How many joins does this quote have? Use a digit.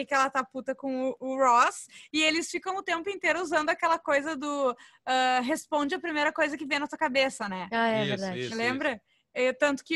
0